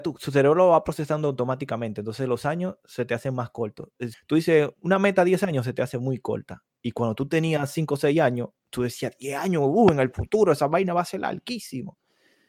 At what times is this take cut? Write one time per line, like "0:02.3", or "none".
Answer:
0:04.1